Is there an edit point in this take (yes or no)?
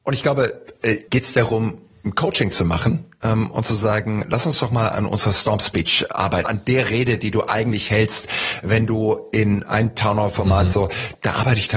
yes